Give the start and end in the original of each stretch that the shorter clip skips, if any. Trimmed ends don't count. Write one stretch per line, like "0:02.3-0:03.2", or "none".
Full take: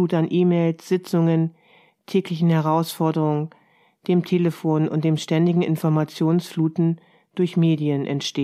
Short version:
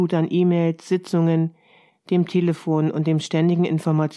0:01.9-0:03.9